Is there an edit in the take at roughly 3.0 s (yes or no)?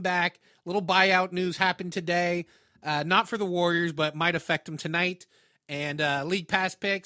no